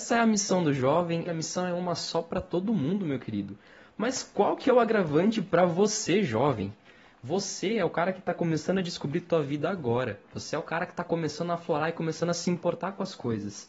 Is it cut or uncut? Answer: cut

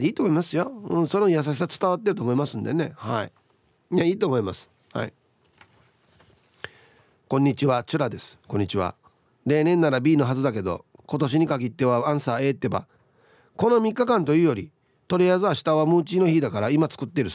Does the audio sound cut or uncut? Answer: uncut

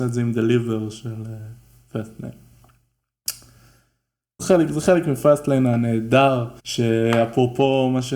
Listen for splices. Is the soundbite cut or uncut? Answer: cut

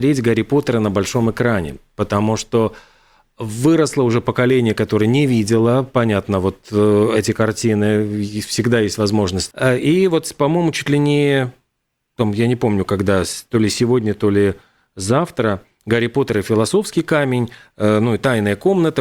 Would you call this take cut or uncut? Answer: cut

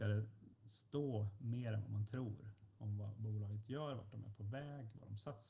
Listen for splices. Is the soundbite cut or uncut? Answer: uncut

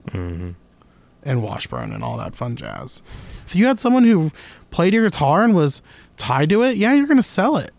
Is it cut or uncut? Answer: cut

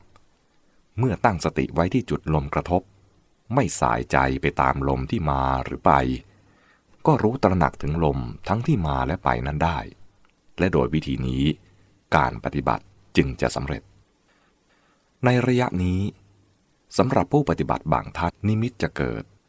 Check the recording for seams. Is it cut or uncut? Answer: cut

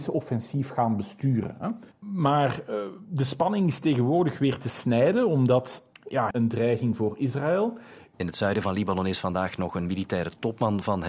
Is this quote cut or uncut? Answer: cut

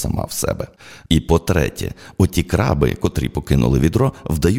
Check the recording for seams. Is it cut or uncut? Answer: uncut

